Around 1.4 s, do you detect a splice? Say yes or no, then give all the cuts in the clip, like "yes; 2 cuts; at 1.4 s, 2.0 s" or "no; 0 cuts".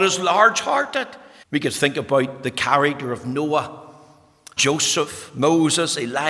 yes; 2 cuts; at 1.4 s, 4.6 s